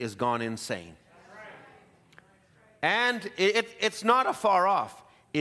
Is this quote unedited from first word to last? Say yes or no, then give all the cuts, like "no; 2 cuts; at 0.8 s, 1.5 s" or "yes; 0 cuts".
yes; 0 cuts